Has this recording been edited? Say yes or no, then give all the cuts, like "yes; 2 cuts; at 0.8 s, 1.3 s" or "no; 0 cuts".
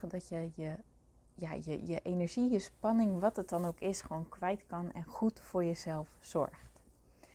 no; 0 cuts